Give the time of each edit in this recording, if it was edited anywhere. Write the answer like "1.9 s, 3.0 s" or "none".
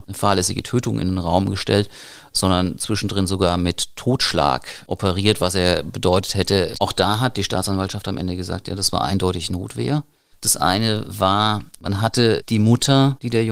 6.7 s, 10.3 s, 11.8 s